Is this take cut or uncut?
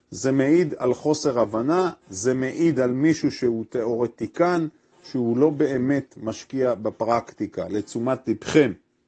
uncut